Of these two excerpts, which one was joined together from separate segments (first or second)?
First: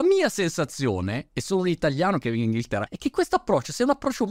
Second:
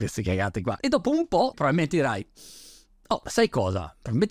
second